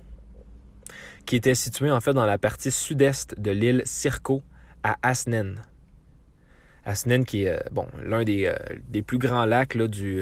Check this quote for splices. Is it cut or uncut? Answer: uncut